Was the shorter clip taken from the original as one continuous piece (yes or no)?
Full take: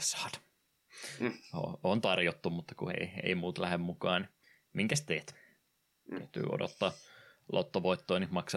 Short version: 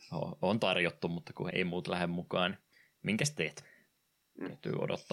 no